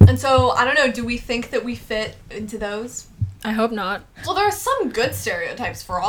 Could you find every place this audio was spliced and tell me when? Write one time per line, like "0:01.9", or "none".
0:04.2